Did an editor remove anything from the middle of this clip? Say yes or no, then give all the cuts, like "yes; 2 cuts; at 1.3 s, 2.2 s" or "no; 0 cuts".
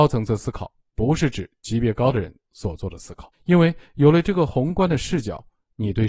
yes; 1 cut; at 3.3 s